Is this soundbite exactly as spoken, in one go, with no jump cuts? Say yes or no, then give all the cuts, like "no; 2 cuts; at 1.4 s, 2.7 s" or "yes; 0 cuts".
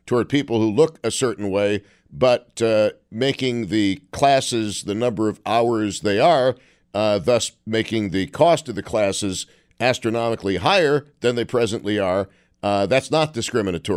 yes; 0 cuts